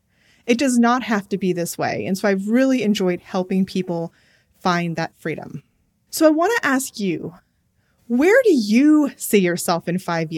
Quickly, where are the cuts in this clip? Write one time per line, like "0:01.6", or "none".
none

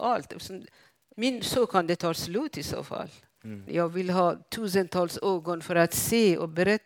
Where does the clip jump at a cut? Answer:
0:01.1
0:03.7

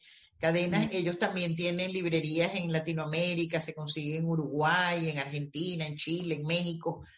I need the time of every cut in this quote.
none

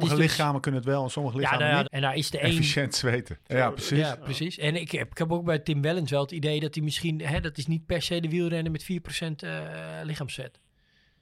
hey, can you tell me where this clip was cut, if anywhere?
0:01.8
0:03.5

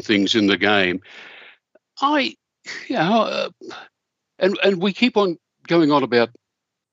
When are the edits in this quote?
none

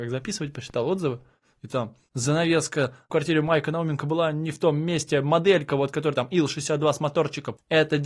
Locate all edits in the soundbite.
none

